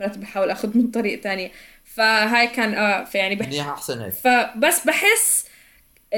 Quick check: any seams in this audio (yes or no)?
yes